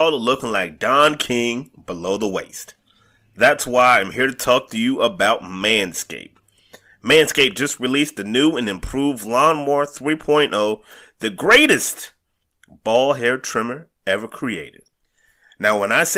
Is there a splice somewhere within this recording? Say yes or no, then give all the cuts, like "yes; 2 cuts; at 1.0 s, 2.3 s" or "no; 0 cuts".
no; 0 cuts